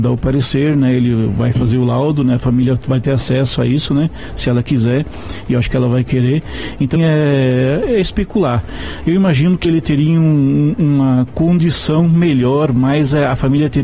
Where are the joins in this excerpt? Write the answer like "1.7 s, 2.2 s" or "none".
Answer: 7.0 s, 9.6 s